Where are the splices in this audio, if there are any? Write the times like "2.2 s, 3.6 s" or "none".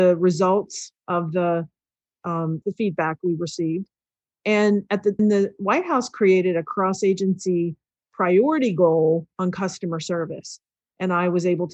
2.6 s, 5.2 s